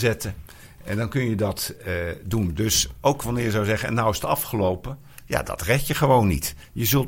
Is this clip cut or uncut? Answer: uncut